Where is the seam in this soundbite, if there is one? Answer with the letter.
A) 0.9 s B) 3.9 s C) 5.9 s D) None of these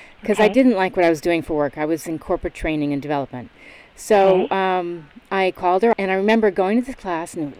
C